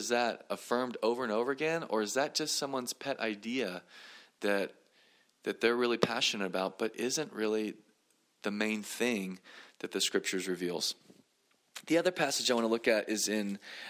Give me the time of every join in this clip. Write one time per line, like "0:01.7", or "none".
none